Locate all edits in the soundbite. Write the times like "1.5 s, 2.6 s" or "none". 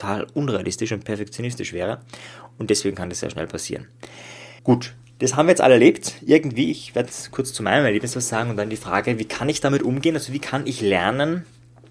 4.6 s